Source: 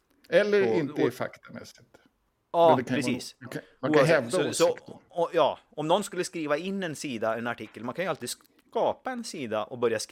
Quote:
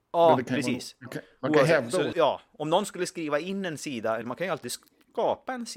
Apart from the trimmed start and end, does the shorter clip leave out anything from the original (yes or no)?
yes